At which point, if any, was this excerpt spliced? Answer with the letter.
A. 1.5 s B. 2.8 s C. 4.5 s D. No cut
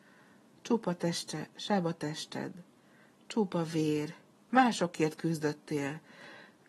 C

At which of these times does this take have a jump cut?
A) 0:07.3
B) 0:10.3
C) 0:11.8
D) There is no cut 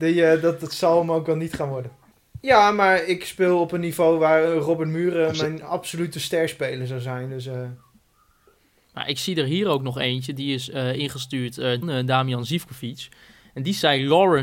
C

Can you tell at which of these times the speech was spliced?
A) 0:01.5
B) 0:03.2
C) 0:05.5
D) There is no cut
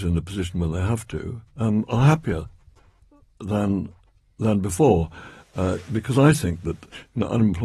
A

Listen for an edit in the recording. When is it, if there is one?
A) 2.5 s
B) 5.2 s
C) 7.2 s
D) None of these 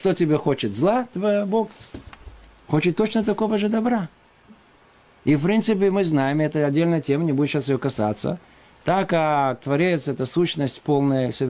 D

